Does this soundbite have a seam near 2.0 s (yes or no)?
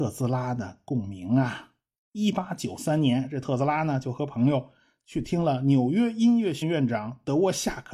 yes